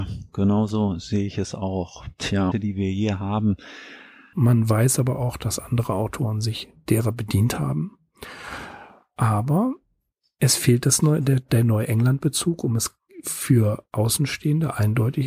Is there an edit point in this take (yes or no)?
yes